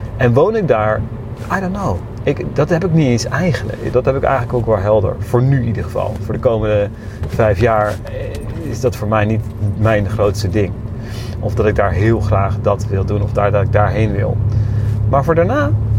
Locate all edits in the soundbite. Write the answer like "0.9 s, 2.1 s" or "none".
3.9 s